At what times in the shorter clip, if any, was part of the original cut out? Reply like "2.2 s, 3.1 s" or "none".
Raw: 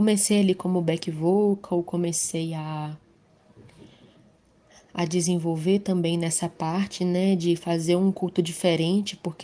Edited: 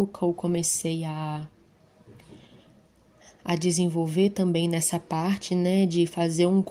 none